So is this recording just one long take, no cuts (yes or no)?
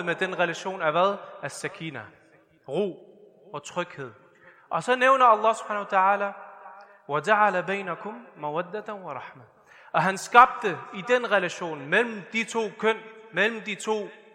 yes